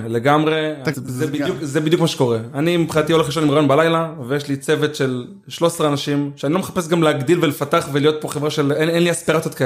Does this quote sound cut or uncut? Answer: cut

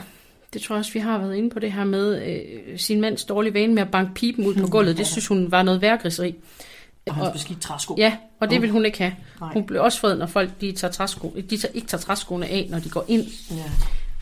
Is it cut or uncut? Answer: cut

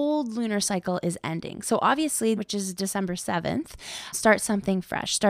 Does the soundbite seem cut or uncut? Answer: cut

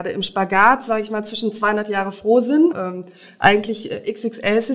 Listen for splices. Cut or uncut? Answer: cut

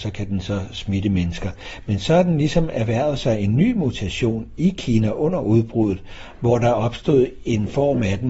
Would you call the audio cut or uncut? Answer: uncut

